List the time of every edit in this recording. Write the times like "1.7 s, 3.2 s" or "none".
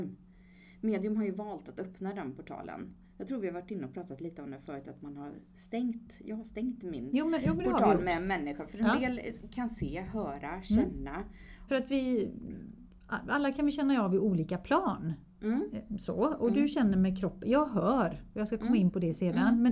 11.7 s